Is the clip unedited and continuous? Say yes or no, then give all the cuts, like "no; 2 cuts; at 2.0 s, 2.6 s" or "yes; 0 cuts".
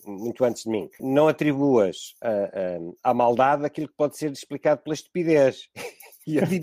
no; 1 cut; at 1.0 s